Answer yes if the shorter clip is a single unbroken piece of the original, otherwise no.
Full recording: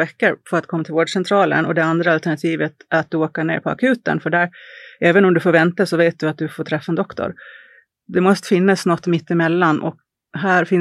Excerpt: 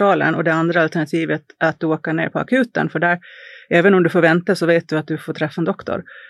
yes